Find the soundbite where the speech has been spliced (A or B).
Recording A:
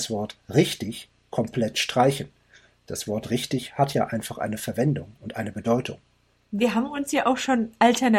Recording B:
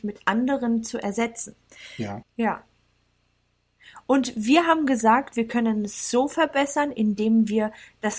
B